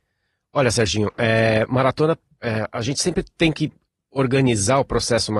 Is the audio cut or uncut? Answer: uncut